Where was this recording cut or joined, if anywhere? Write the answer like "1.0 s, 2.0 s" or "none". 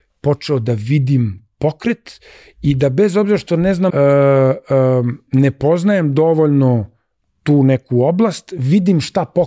3.9 s